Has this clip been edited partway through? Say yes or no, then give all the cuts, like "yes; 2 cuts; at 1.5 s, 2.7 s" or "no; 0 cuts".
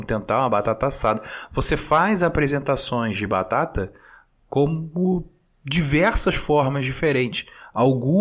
no; 0 cuts